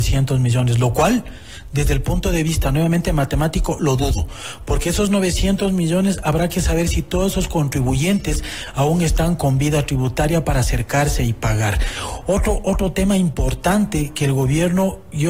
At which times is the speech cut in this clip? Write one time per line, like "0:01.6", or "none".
none

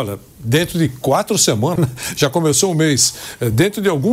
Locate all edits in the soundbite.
0:01.8

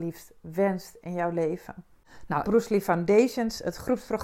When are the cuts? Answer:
0:02.4

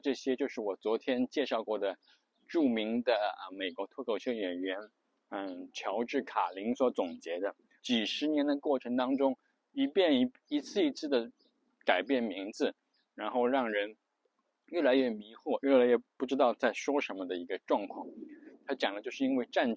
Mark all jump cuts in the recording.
0:07.8

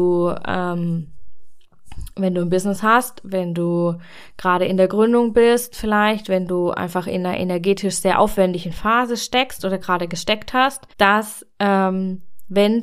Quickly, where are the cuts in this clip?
0:10.9

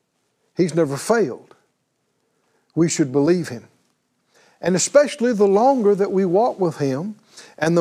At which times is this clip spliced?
none

